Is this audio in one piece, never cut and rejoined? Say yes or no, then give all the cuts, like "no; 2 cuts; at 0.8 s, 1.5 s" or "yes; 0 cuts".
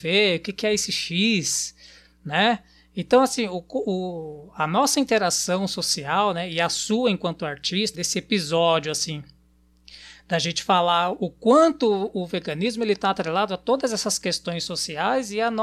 no; 1 cut; at 7.9 s